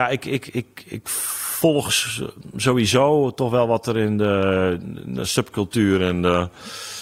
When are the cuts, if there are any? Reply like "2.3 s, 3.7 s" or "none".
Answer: 2.5 s